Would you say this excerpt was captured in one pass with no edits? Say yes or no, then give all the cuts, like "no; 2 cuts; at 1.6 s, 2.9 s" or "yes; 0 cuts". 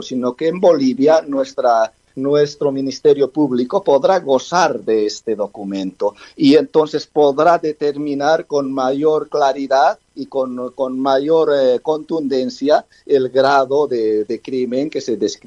yes; 0 cuts